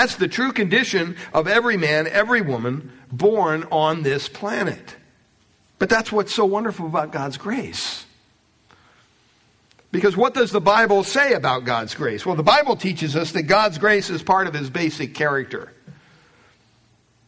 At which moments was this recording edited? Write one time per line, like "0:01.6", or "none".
0:05.7